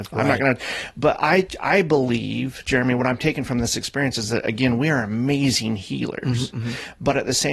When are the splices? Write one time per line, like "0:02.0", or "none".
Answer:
none